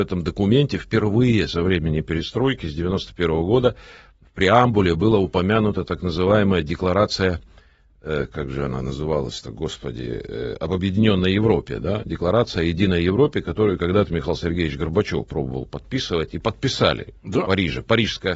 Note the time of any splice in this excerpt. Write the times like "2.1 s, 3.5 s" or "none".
none